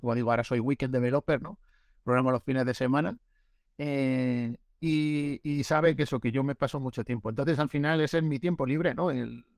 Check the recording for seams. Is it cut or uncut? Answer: uncut